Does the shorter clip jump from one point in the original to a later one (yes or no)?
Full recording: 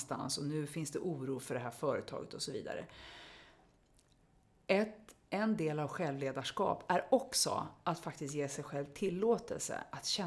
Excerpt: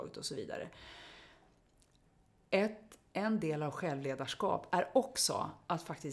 no